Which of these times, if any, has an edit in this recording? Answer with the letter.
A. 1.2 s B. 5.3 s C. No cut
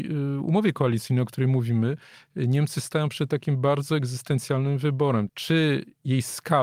B